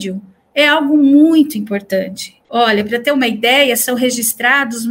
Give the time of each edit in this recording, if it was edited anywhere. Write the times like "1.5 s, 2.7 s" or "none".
2.4 s